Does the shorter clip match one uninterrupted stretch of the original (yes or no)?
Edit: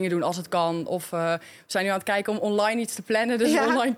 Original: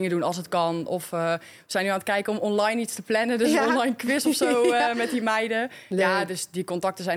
yes